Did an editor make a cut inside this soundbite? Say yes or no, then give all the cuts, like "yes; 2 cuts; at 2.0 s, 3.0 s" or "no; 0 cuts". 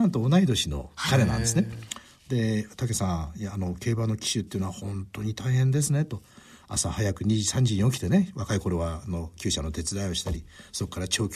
no; 0 cuts